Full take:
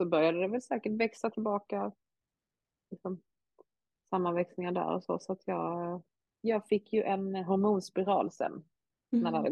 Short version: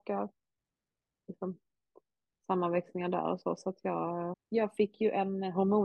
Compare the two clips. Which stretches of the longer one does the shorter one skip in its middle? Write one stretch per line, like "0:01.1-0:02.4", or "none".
0:06.0-0:06.3